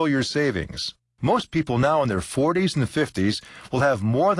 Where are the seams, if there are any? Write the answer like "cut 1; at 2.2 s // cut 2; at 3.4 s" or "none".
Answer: cut 1; at 1.2 s